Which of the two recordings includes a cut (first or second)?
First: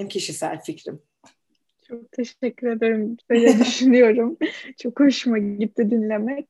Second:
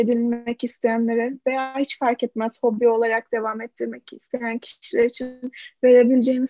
first